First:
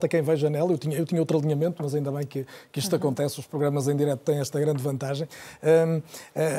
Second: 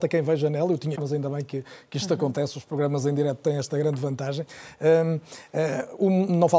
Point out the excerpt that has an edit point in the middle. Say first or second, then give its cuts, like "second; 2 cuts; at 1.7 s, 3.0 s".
second; 1 cut; at 0.9 s